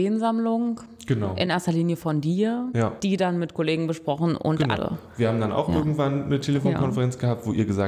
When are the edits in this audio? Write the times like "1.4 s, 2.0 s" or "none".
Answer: 4.8 s